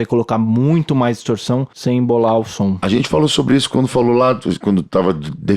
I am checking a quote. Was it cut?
no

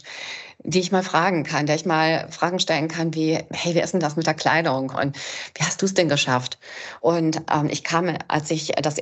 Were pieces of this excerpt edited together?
yes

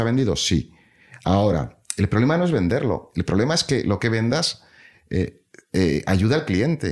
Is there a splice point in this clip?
no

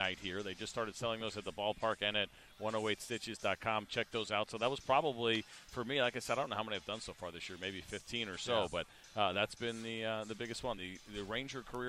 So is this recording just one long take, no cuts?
yes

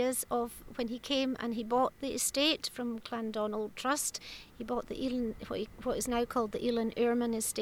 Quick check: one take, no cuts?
yes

